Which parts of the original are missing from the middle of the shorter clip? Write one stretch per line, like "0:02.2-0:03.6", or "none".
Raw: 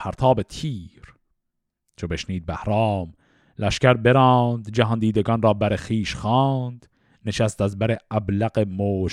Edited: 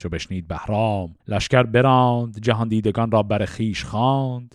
0:03.2-0:03.5